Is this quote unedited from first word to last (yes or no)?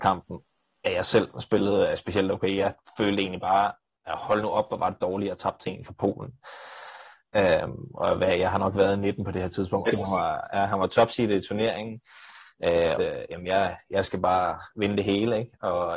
no